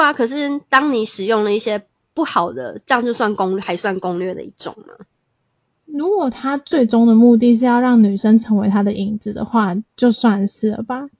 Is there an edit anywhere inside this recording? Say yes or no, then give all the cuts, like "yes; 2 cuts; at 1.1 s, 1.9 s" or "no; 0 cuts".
yes; 1 cut; at 9.9 s